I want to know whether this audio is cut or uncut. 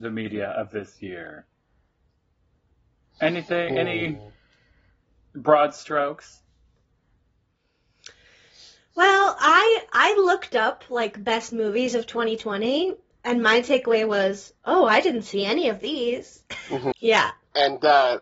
cut